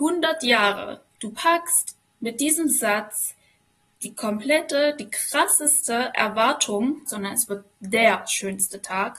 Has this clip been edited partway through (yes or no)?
yes